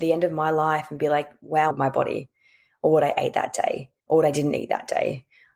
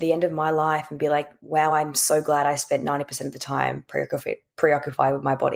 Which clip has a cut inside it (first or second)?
first